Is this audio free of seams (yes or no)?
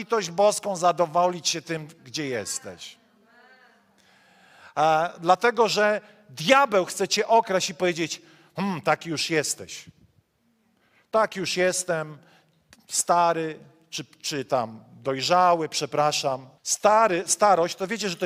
no